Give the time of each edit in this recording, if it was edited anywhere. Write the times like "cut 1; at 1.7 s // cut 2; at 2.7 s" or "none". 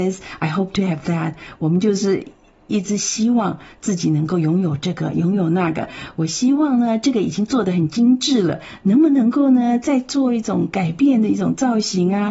none

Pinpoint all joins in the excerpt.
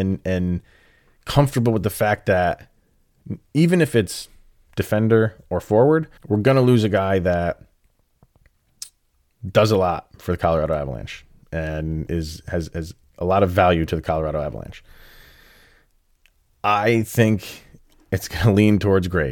cut 1; at 6.2 s

